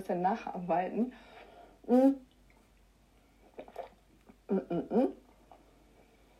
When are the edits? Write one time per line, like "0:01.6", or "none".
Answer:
none